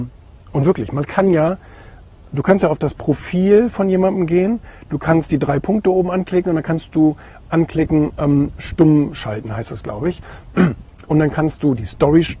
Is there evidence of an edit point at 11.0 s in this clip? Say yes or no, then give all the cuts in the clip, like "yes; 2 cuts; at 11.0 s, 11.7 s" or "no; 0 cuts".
no; 0 cuts